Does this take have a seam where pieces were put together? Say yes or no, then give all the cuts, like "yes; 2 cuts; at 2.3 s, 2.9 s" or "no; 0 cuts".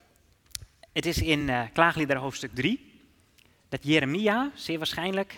no; 0 cuts